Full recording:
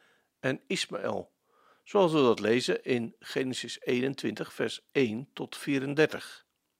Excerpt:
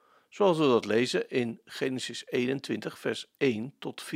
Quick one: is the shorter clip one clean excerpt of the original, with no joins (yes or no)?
yes